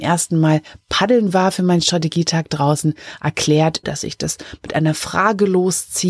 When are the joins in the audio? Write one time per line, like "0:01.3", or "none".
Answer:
0:03.8